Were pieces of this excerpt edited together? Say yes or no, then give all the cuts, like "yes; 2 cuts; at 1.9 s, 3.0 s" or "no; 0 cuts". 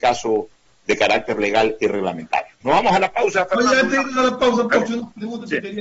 yes; 1 cut; at 2.6 s